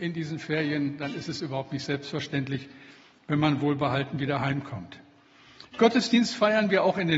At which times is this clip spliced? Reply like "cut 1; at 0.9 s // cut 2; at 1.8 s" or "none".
none